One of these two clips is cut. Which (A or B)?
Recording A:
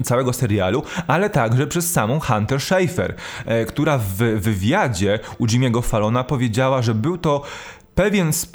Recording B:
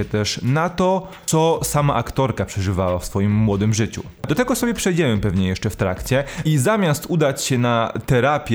B